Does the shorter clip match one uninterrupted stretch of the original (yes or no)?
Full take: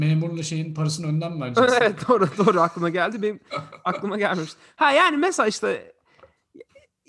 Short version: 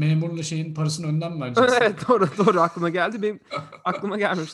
yes